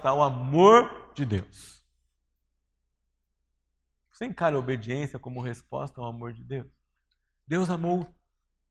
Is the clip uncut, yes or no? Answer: yes